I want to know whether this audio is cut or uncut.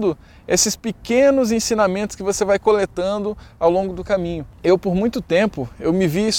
uncut